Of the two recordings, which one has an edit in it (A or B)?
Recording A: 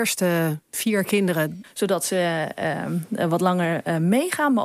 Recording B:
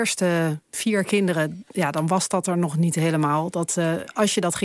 A